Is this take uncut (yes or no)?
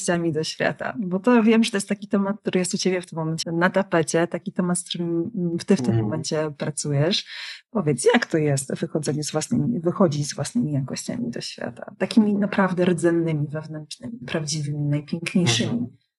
no